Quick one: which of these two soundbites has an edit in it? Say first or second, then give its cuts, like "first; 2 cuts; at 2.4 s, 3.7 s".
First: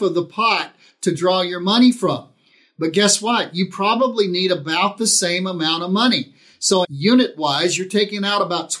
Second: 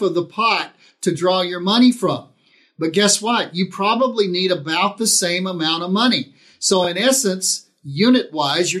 first; 1 cut; at 6.8 s